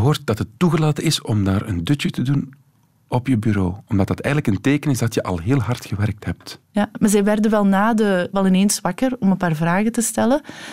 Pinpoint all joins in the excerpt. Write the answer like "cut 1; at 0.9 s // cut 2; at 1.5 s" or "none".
cut 1; at 6.6 s // cut 2; at 8.3 s